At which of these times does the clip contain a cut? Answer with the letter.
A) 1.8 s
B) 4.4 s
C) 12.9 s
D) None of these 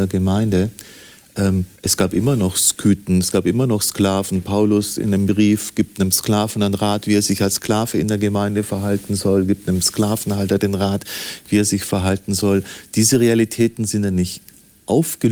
A